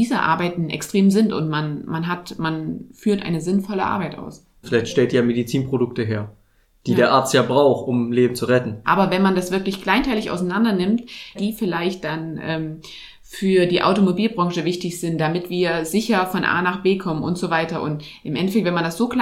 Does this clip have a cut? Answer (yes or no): yes